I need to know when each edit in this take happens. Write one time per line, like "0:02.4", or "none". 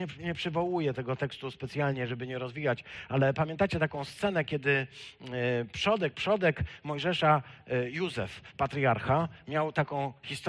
none